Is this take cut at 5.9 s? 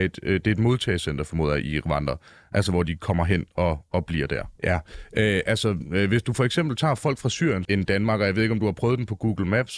no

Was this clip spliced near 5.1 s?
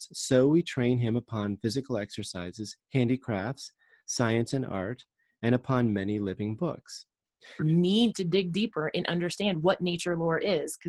no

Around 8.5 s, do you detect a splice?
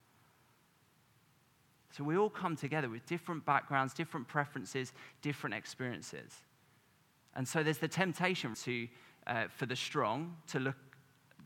yes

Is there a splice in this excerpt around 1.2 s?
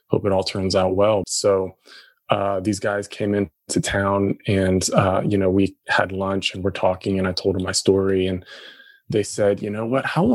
yes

